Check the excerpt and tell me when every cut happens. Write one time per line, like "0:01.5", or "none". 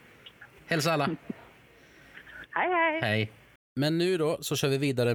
0:03.6

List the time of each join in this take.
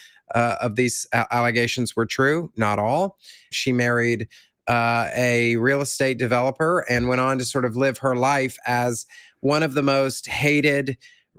0:03.5

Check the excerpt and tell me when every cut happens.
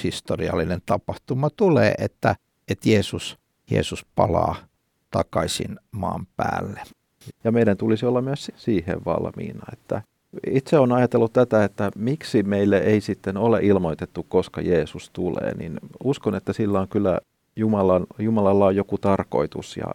0:07.3
0:08.5

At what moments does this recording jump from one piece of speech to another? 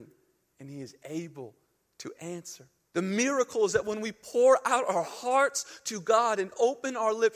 0:02.9

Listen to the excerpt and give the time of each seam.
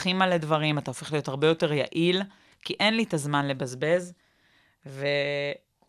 none

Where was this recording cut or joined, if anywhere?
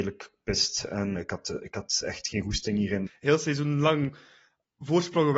0:01.2
0:03.1

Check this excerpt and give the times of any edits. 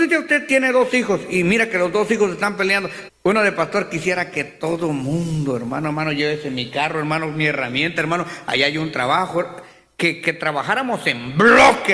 0:03.1

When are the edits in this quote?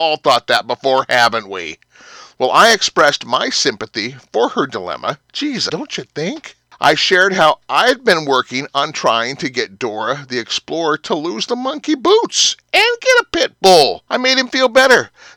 0:05.7
0:14.1

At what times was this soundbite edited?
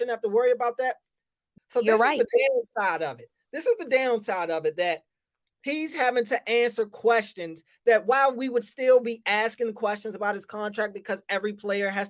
0:01.6

